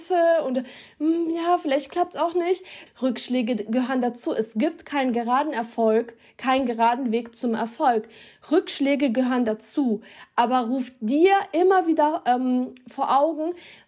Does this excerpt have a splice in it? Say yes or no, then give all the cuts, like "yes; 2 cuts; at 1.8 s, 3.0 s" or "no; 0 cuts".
yes; 1 cut; at 2.9 s